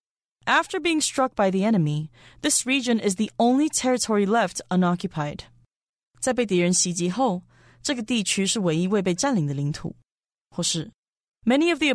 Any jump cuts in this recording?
no; 0 cuts

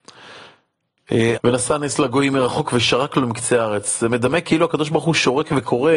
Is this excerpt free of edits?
no; 1 cut; at 1.4 s

